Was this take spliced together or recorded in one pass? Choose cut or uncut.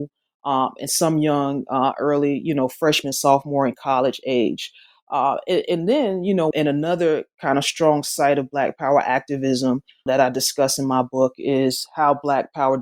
cut